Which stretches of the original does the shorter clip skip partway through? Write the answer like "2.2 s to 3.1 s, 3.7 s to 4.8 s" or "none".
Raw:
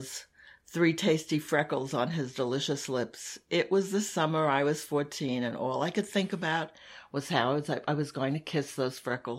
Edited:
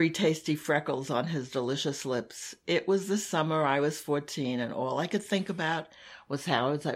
none